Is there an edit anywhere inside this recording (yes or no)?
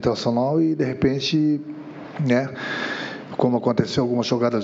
no